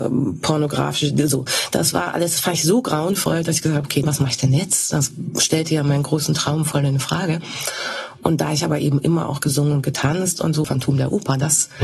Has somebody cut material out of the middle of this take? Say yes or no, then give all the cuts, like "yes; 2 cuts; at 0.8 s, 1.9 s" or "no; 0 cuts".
yes; 2 cuts; at 4.0 s, 10.6 s